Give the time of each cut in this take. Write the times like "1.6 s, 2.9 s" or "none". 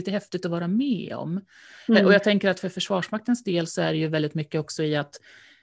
none